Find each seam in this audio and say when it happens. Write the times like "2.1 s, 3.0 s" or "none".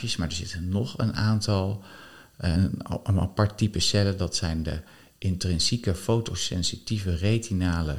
2.5 s